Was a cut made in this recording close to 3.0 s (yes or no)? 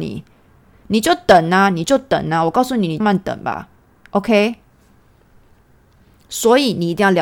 yes